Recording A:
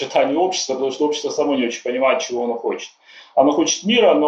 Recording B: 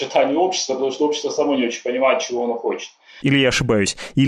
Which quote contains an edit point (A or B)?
B